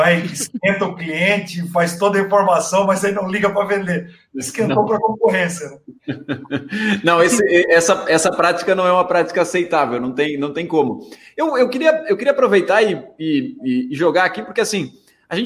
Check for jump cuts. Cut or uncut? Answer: uncut